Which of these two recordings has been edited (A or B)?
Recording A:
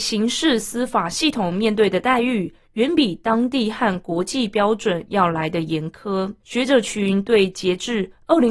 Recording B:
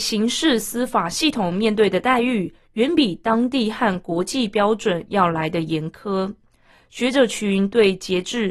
A